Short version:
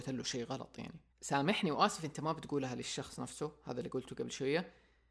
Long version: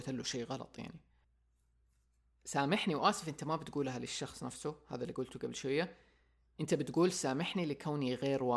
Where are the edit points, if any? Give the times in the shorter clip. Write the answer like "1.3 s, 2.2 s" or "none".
1.1 s

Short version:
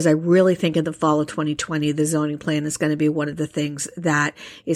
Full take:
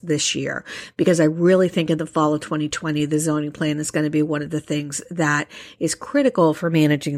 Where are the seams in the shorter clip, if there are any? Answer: none

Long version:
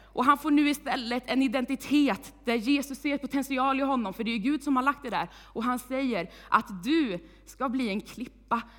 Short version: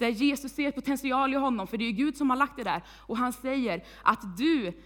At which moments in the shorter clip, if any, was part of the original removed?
none

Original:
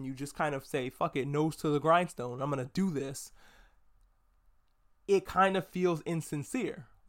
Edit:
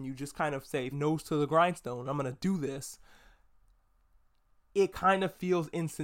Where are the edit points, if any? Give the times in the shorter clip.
0.9 s

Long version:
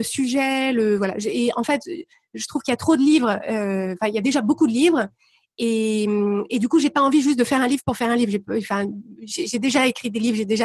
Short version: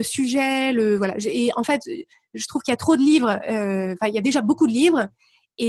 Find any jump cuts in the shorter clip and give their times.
none

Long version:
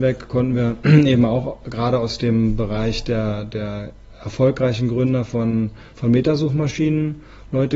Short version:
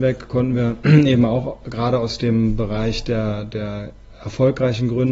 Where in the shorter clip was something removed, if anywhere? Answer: none

